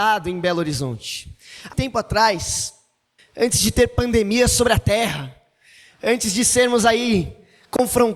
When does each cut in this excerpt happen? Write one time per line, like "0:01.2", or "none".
0:01.7
0:03.2